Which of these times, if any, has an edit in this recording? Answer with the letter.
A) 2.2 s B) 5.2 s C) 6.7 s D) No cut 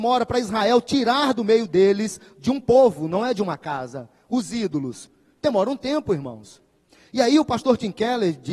D